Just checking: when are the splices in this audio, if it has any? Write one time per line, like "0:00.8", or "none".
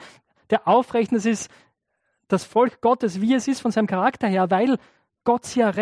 none